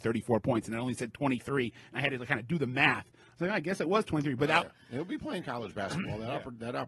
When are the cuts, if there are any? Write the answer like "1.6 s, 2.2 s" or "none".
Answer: 4.6 s

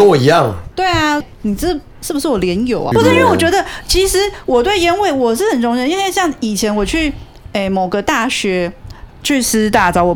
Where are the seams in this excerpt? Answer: 1.2 s, 2.9 s

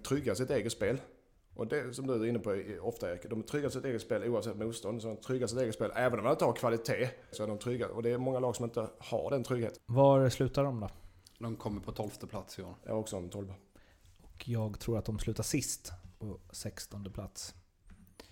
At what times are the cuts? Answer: 7.3 s, 9.8 s

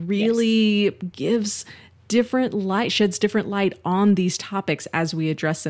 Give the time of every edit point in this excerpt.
none

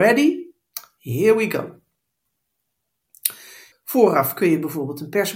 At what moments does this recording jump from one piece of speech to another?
3.7 s

